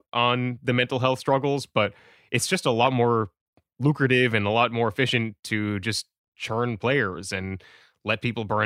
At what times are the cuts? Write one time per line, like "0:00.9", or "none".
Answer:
none